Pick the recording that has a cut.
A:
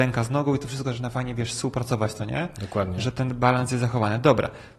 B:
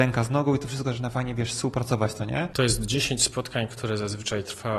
B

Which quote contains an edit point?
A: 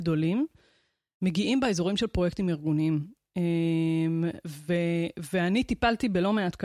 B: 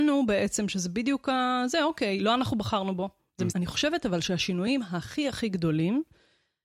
B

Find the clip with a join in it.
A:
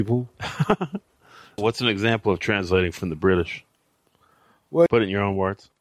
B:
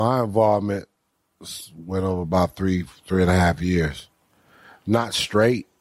A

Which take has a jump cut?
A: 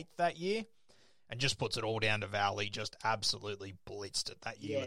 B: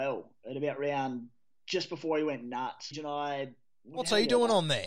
B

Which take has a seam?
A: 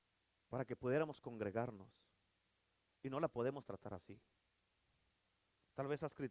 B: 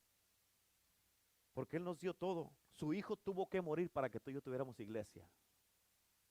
B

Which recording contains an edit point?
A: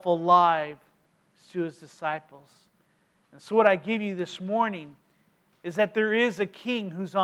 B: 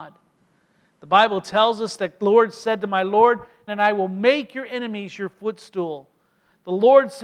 B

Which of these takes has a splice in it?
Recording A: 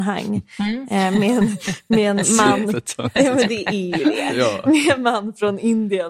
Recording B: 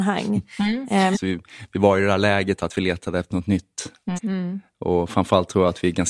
B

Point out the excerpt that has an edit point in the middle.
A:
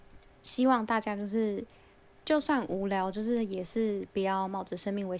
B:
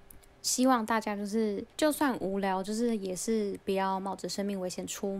B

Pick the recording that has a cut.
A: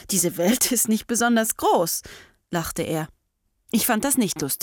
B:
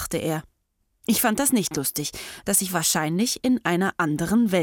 B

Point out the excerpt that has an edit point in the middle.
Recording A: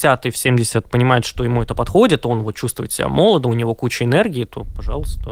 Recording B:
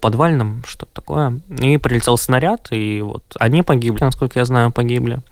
B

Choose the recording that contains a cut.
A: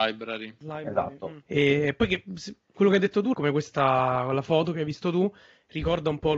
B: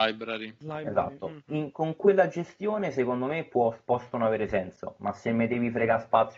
A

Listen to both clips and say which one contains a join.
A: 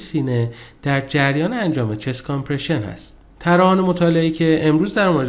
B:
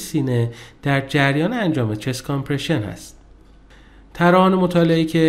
A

